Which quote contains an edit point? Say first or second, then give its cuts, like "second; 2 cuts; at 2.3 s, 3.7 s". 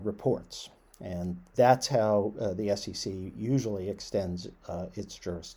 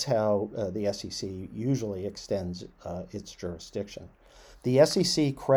second; 1 cut; at 4.5 s